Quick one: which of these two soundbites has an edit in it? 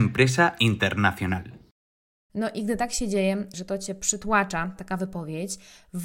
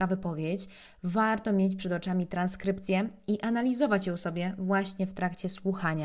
first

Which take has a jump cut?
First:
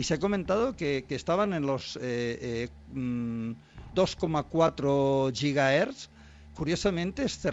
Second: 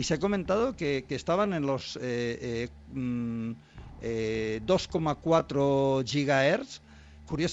first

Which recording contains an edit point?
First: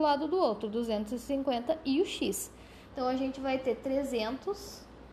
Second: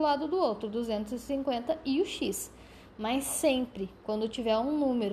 first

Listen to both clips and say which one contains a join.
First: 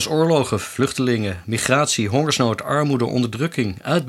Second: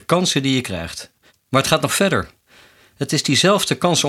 second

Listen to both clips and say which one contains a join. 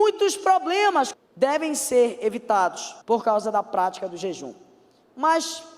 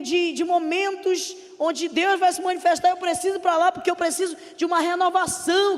first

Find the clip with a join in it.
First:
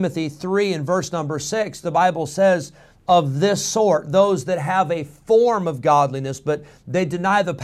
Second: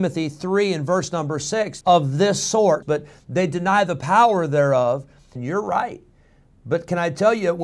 second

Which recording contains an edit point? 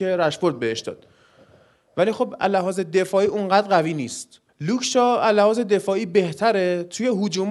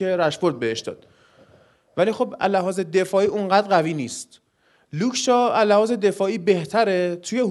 first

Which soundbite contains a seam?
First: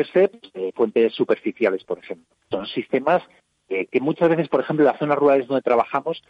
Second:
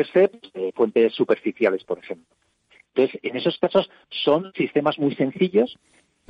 first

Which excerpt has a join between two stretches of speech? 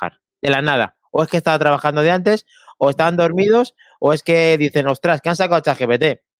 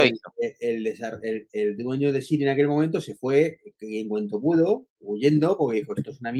second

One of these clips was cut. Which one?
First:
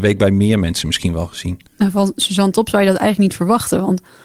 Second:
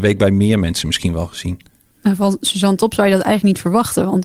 first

